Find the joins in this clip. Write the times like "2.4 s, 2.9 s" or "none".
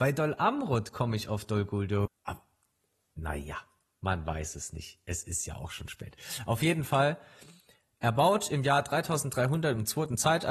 2.1 s